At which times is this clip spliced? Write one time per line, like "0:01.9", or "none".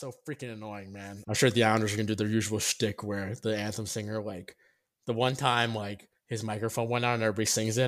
0:01.2